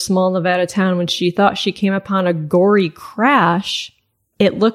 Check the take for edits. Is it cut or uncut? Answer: uncut